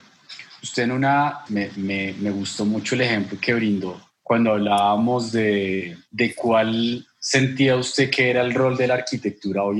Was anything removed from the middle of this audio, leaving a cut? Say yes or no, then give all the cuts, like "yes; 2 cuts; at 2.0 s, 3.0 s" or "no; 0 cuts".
yes; 1 cut; at 1.5 s